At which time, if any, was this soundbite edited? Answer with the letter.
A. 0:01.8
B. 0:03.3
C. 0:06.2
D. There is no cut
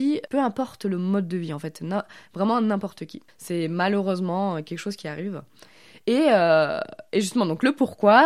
B